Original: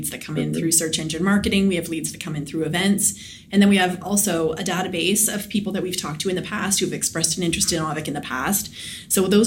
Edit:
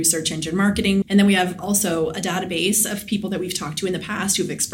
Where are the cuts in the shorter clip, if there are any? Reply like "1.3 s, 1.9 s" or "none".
1.0 s